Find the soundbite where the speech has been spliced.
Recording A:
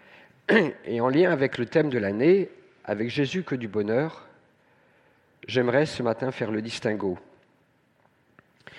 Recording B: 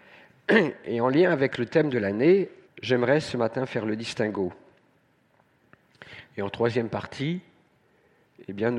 B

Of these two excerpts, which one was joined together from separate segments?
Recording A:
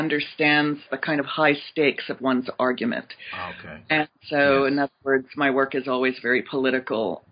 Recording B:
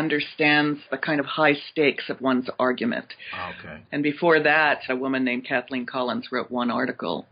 B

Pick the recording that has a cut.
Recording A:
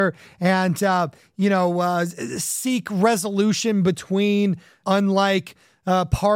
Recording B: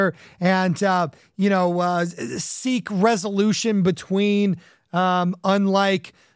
A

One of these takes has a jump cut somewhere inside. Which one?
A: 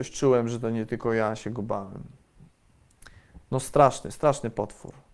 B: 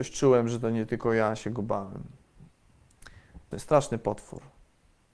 B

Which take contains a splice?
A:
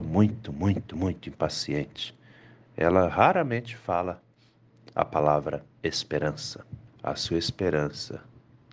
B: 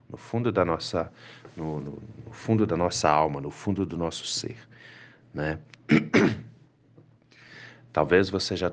A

